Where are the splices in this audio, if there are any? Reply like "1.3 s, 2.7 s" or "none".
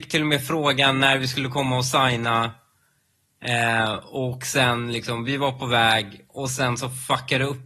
none